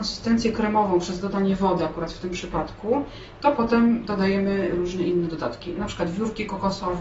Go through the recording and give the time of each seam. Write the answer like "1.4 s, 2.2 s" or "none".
none